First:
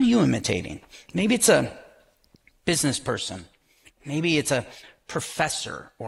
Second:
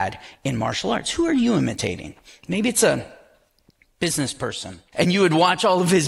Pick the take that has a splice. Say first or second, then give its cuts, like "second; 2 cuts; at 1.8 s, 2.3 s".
second; 1 cut; at 4.9 s